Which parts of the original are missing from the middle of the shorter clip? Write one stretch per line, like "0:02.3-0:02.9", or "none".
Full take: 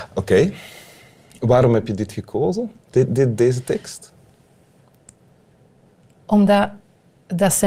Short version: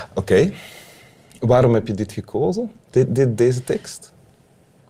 none